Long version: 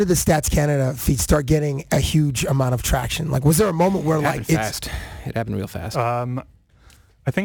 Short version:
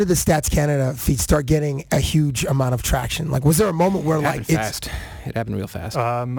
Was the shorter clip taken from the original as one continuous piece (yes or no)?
yes